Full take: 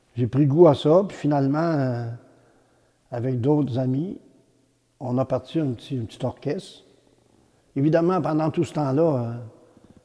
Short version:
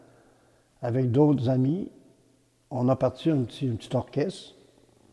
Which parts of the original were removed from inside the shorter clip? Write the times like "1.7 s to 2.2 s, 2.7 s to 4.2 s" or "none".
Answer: none